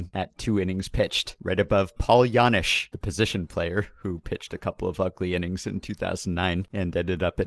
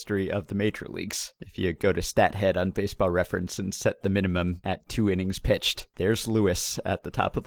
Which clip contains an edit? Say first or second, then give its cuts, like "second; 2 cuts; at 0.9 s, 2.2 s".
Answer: first; 1 cut; at 1.4 s